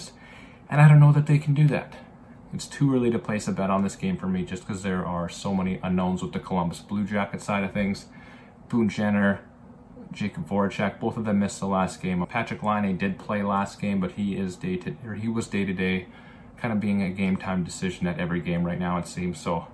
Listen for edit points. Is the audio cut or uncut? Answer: cut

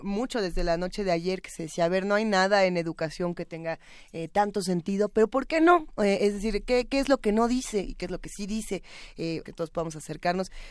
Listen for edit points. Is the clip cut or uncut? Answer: cut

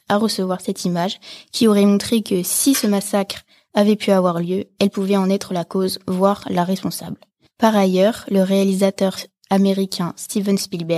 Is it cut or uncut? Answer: uncut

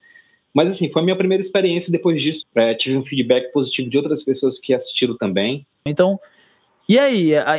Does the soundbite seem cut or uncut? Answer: cut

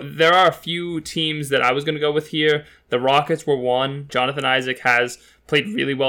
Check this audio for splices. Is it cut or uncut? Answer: cut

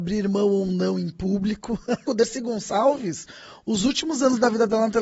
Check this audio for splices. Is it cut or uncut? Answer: cut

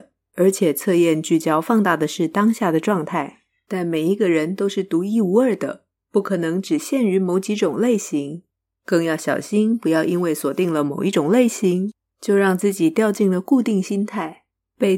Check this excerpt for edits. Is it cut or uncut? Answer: uncut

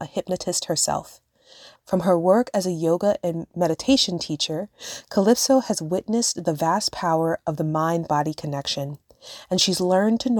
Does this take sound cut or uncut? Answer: cut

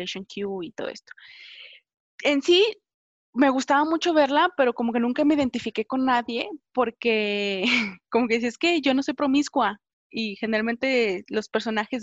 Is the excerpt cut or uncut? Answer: uncut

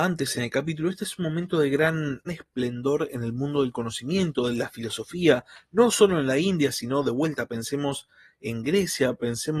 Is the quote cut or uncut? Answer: cut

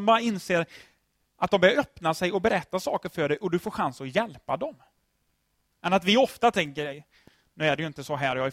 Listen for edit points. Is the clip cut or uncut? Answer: uncut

